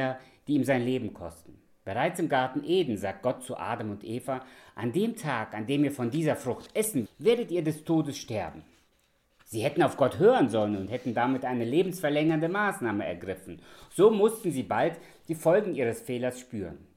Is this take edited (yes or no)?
yes